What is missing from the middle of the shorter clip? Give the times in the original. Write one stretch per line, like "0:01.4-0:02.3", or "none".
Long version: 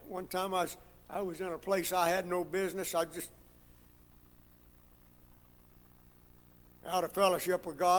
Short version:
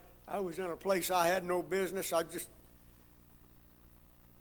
none